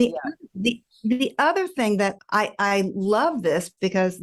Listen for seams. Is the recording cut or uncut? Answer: cut